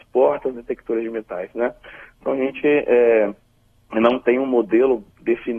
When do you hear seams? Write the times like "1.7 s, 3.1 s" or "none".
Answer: none